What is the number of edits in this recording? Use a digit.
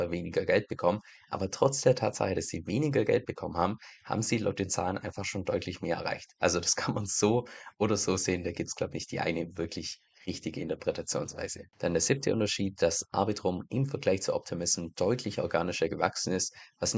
0